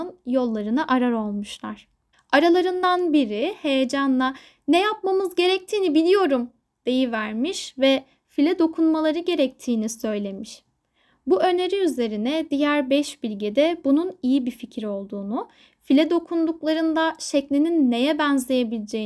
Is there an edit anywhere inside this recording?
yes; 1 cut; at 2.1 s

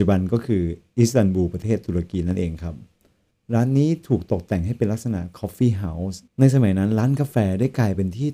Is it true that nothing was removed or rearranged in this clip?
no; 1 cut; at 6.3 s

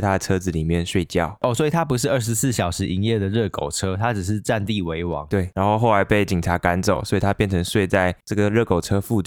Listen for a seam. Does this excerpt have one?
no; 0 cuts

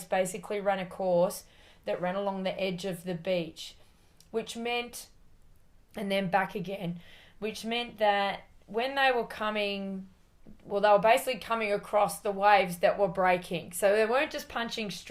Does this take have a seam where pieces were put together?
no; 0 cuts

